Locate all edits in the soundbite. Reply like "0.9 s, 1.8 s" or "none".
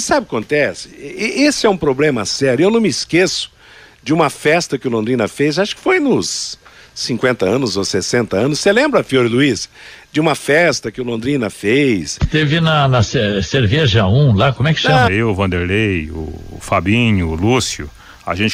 15.1 s